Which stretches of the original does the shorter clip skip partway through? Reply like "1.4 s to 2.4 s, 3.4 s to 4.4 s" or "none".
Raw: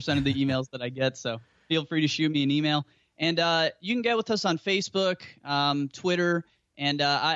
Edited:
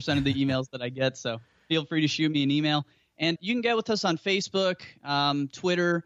3.4 s to 3.8 s